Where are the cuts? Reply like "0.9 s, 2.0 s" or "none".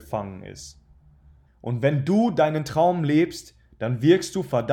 1.5 s